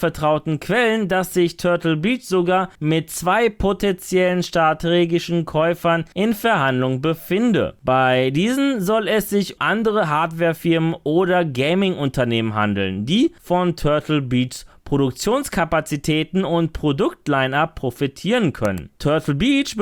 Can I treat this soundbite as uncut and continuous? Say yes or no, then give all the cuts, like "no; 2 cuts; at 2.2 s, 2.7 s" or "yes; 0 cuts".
no; 1 cut; at 9.6 s